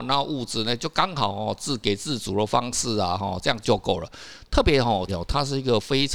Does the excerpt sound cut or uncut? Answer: cut